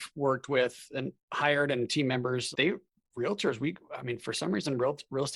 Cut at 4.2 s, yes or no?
no